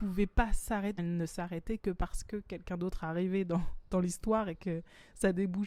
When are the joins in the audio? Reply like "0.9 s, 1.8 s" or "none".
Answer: 1.0 s